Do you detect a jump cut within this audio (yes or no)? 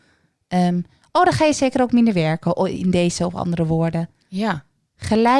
no